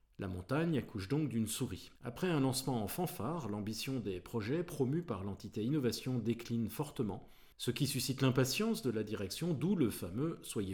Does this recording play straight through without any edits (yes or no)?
no